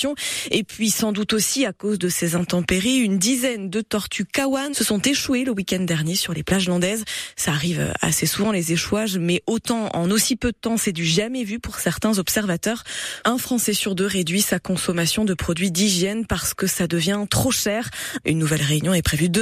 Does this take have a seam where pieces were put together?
yes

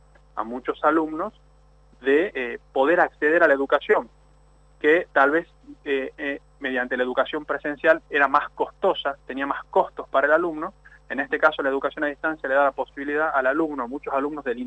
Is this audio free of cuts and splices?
yes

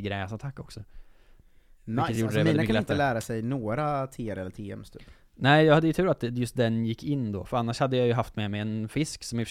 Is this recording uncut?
yes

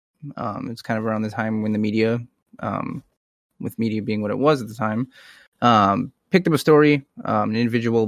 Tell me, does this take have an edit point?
no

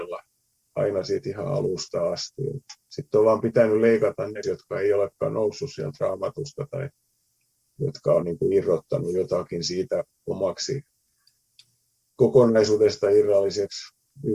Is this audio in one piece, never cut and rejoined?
no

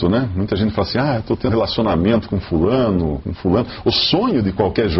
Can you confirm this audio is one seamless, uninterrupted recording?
no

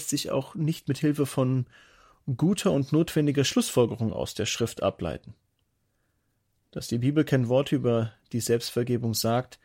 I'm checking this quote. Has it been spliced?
no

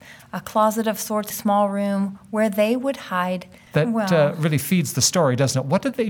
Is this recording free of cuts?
no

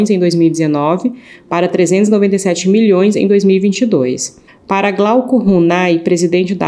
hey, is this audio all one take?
no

